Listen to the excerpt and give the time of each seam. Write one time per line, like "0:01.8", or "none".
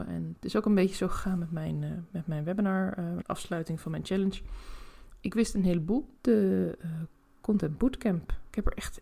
0:03.2
0:06.2